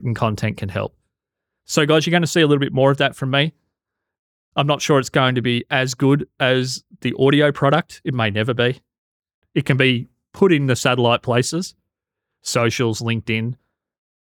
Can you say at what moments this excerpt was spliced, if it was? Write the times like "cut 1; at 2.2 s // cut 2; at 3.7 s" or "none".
cut 1; at 9.4 s